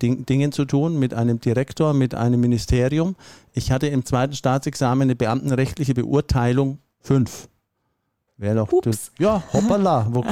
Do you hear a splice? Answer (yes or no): no